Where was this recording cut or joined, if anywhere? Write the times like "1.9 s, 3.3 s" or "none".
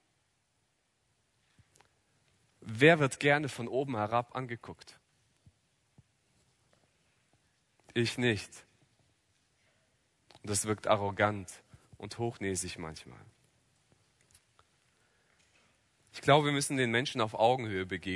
none